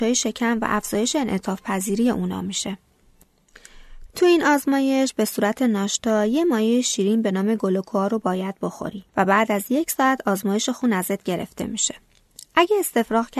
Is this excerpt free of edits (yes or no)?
no